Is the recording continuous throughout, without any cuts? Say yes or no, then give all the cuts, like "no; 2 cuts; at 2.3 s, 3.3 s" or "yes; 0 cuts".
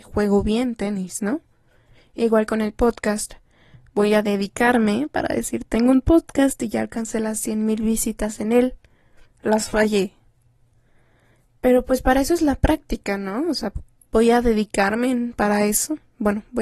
no; 1 cut; at 9.2 s